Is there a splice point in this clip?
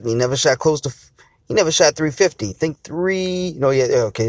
no; 0 cuts

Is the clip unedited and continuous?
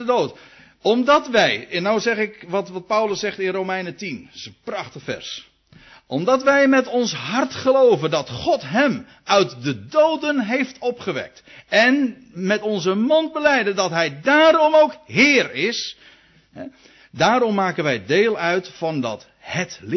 yes; 0 cuts

